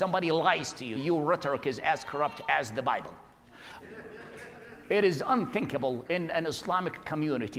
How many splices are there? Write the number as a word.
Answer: two